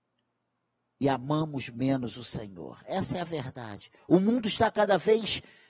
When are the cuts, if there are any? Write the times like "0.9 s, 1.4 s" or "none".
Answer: none